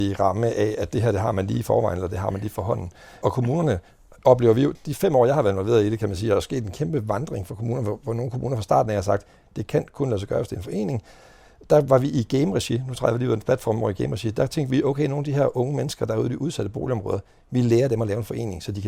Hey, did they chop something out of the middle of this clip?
no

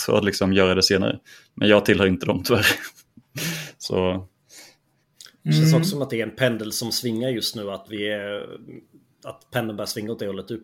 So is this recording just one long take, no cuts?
yes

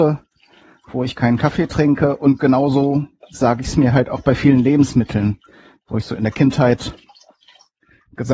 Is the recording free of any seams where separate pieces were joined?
yes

